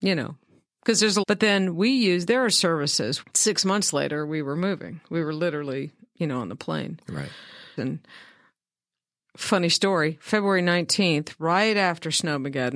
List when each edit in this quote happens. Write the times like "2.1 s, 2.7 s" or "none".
1.2 s, 3.2 s, 7.8 s